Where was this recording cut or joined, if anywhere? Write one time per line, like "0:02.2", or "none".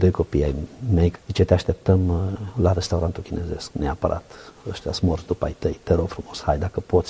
0:03.7